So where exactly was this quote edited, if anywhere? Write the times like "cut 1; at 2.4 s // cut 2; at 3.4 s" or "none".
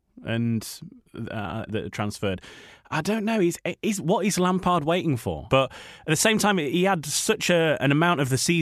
cut 1; at 1.7 s // cut 2; at 5.5 s